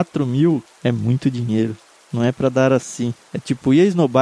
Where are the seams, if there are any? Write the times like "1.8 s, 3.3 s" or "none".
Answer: none